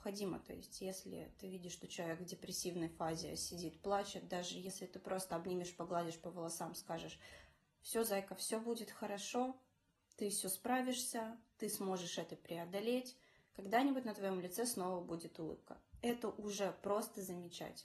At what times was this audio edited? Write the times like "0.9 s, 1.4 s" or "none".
none